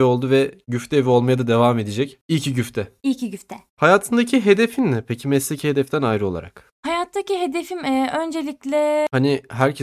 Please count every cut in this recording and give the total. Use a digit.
0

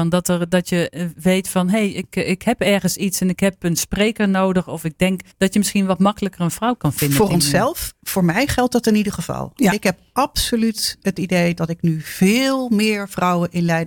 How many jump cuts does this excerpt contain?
1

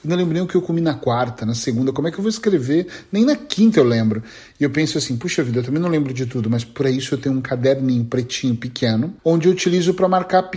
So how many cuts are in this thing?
1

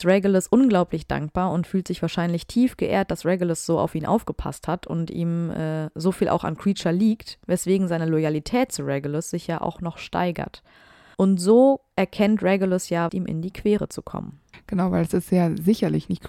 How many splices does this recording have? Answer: 2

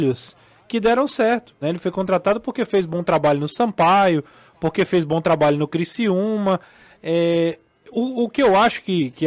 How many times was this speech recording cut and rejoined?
1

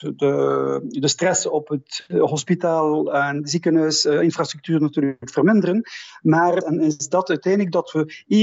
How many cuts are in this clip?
1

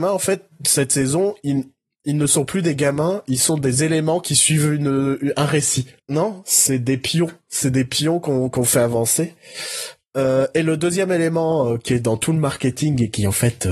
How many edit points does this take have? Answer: 1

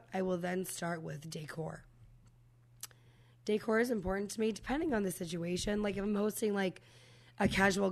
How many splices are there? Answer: 0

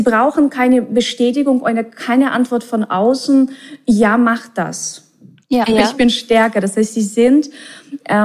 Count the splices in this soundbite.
1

